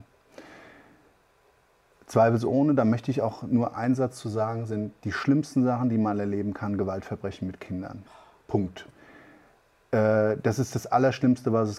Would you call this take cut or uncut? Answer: uncut